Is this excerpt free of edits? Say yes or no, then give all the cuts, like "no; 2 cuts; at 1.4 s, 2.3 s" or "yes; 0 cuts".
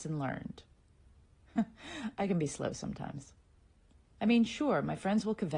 no; 1 cut; at 4.1 s